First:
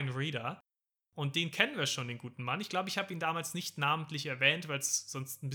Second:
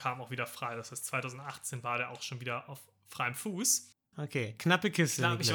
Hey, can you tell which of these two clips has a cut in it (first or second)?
second